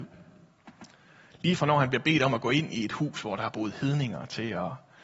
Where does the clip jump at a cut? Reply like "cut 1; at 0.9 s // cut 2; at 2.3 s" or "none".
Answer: none

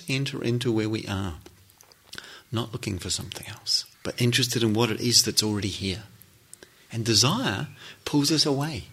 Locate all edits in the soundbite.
cut 1; at 3.9 s

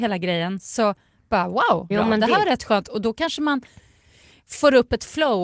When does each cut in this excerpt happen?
cut 1; at 1.9 s

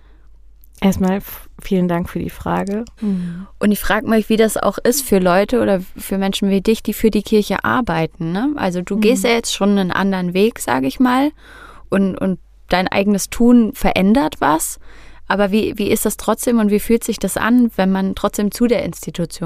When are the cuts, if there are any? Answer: cut 1; at 3.0 s

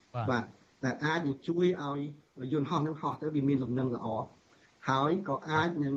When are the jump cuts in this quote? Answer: none

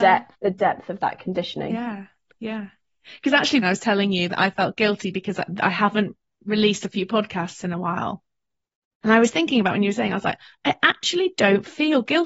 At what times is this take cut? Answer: cut 1; at 3.6 s

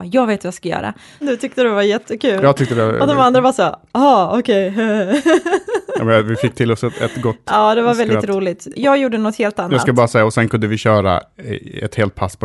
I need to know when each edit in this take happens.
cut 1; at 1.2 s // cut 2; at 8.7 s

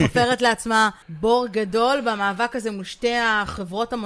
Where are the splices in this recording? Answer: cut 1; at 1.0 s

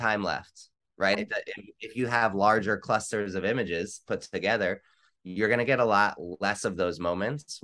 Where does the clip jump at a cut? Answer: cut 1; at 1.1 s

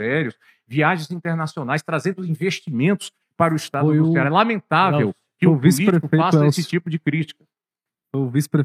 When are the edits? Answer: none

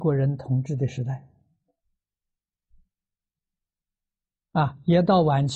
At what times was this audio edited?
none

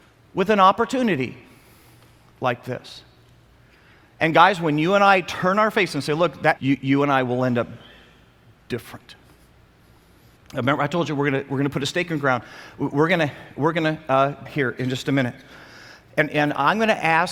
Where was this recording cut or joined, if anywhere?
cut 1; at 6.6 s // cut 2; at 10.4 s // cut 3; at 14.5 s

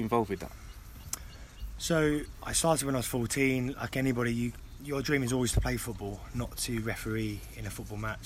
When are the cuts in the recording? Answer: cut 1; at 4.8 s

